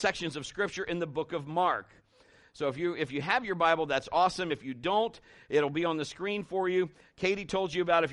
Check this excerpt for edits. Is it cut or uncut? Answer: uncut